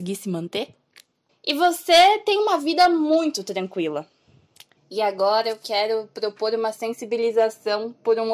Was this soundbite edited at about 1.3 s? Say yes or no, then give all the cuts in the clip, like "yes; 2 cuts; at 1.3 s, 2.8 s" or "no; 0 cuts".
yes; 2 cuts; at 1.3 s, 4.8 s